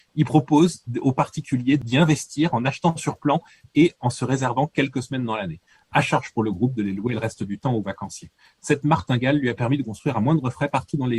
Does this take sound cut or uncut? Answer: uncut